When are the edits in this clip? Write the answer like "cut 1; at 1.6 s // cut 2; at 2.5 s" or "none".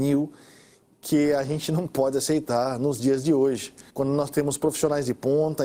cut 1; at 3.9 s